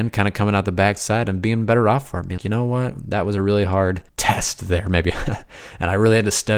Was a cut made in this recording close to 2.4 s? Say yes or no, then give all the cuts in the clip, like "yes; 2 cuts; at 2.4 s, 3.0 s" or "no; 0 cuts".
yes; 2 cuts; at 2.4 s, 4.1 s